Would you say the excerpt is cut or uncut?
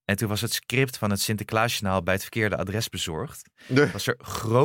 uncut